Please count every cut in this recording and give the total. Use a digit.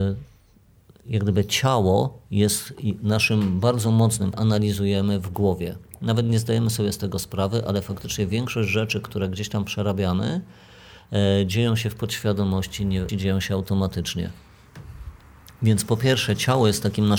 2